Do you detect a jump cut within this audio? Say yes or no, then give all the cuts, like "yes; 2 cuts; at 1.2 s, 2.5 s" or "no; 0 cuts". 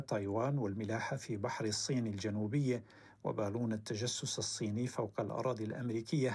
no; 0 cuts